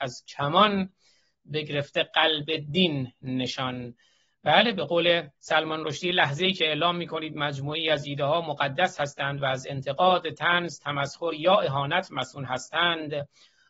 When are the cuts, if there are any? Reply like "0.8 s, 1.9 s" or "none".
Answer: 5.4 s